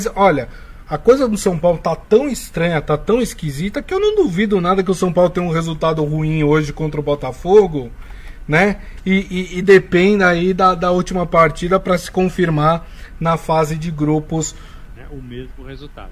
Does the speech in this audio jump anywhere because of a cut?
yes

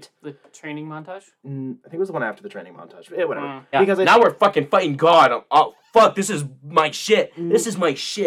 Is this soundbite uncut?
no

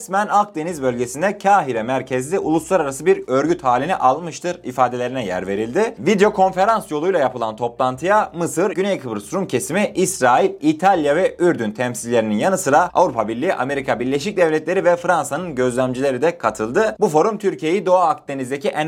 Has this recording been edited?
yes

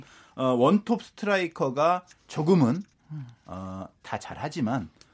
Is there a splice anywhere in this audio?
no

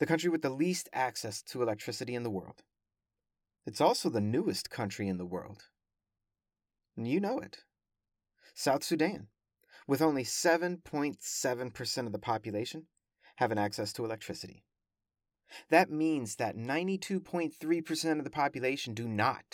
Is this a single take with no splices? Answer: yes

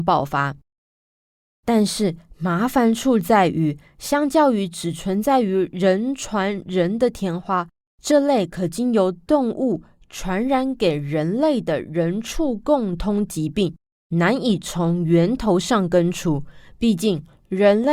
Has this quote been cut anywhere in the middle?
no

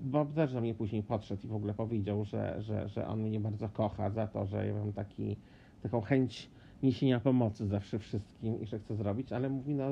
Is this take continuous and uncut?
yes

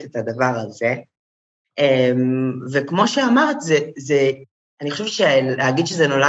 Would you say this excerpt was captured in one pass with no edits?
yes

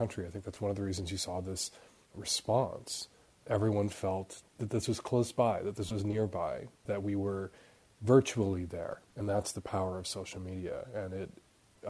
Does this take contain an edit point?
no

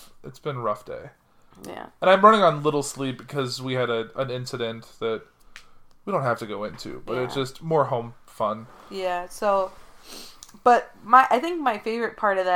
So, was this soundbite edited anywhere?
no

